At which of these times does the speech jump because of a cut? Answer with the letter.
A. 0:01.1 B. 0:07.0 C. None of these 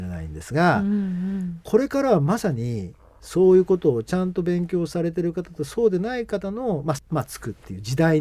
B